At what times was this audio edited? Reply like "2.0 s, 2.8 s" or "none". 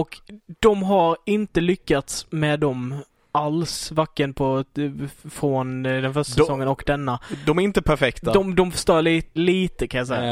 9.4 s